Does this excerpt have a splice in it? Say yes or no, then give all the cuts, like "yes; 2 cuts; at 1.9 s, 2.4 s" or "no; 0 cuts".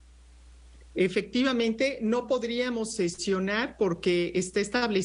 no; 0 cuts